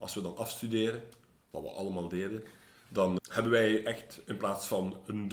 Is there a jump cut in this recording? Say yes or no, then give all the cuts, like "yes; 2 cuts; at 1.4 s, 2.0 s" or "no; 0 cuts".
yes; 1 cut; at 3.2 s